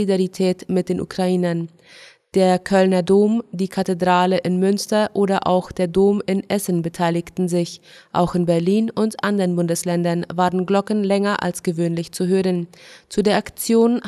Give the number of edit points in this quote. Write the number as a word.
zero